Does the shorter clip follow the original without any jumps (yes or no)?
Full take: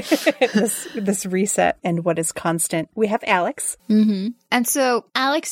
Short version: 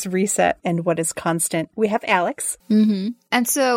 yes